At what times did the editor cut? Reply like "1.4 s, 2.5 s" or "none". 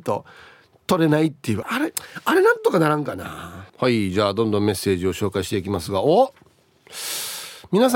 1.6 s, 3.7 s